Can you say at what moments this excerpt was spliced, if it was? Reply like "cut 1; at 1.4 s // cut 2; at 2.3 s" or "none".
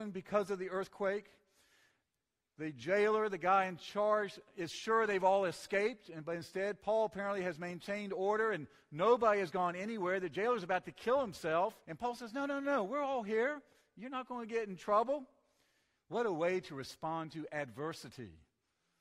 cut 1; at 11.8 s // cut 2; at 15.9 s